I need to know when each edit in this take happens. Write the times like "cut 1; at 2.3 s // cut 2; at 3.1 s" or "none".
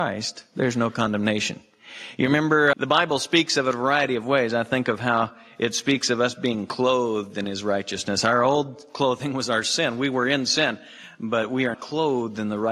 cut 1; at 2.7 s // cut 2; at 11.7 s